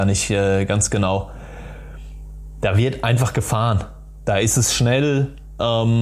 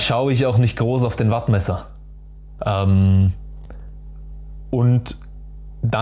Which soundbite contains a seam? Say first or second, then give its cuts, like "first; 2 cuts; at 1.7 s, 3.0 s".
second; 1 cut; at 2.6 s